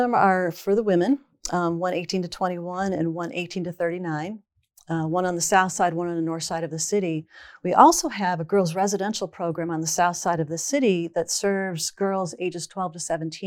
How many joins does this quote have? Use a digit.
0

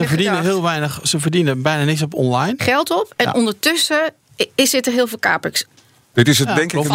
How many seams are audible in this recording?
1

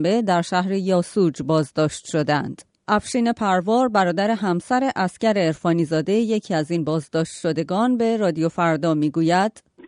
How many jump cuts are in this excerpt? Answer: 0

